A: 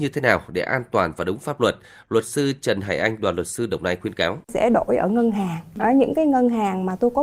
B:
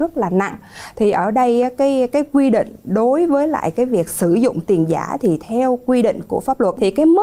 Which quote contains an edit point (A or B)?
A